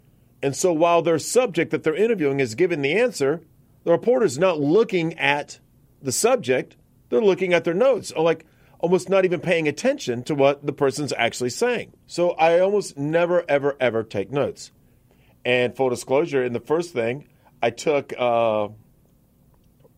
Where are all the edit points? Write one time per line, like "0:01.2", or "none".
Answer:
0:12.0